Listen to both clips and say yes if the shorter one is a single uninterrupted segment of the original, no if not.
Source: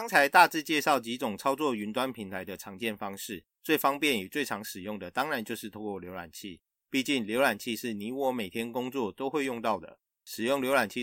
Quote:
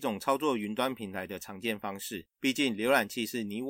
no